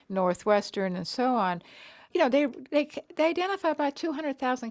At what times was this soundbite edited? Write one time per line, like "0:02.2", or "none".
0:02.1